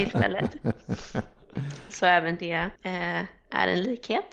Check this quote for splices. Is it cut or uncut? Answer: cut